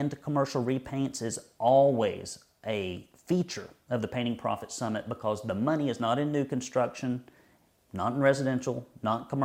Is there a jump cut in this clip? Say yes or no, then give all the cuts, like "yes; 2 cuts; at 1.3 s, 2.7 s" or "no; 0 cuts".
no; 0 cuts